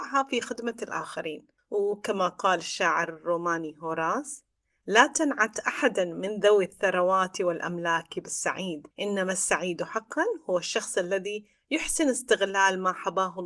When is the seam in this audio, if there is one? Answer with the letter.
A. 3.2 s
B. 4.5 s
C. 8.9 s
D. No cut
C